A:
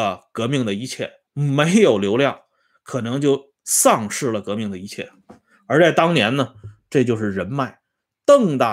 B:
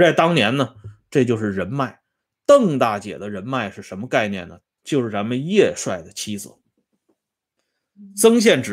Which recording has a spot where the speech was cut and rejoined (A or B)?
B